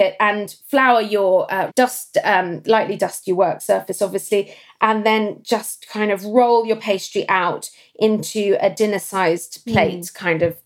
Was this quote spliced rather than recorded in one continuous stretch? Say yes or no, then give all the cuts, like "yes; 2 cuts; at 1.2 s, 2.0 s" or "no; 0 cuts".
yes; 1 cut; at 1.7 s